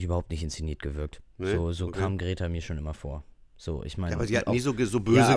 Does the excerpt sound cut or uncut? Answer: uncut